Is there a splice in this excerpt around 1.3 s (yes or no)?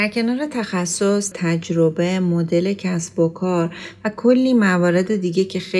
yes